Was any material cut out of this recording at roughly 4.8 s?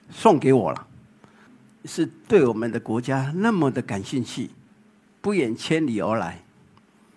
no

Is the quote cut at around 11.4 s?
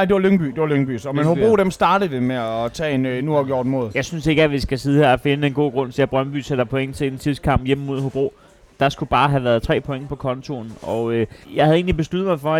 yes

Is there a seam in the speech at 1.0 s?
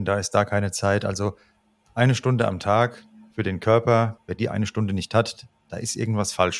no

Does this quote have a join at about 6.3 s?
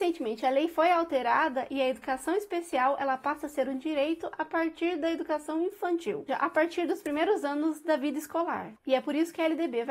yes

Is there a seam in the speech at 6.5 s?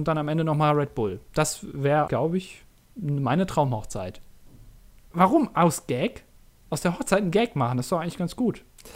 no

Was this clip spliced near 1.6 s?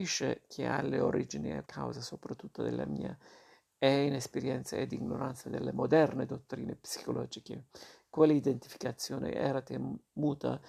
yes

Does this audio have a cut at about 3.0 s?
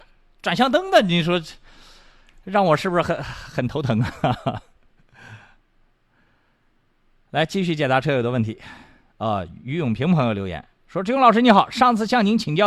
no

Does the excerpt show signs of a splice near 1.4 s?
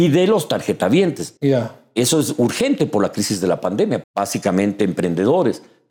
yes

